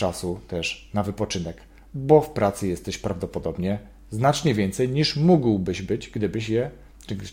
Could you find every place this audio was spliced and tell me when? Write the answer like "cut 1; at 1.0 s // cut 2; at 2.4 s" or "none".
none